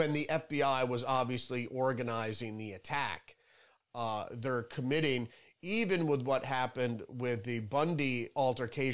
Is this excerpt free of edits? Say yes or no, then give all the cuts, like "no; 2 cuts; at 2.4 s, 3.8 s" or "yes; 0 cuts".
no; 1 cut; at 3.8 s